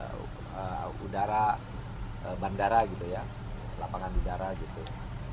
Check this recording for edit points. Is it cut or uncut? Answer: uncut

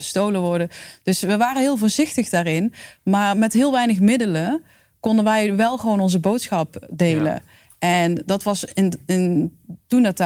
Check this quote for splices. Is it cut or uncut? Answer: uncut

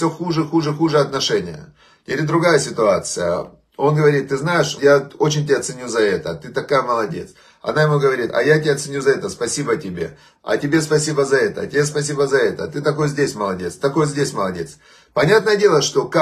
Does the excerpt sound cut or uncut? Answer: cut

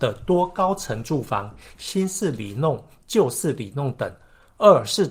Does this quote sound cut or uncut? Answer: cut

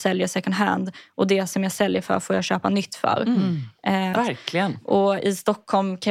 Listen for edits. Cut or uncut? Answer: cut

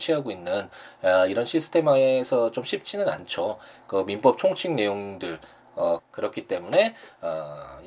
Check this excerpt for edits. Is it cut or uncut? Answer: cut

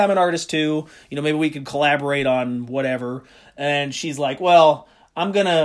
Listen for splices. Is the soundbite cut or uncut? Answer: uncut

